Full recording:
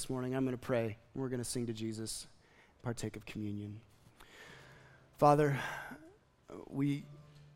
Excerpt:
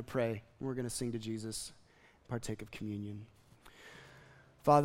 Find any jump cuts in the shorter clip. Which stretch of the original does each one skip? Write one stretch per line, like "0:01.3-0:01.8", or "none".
none